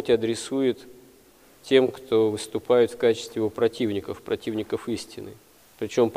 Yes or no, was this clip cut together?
no